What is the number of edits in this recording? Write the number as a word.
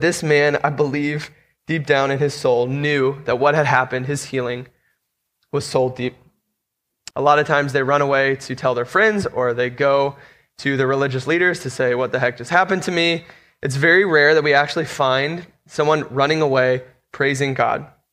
one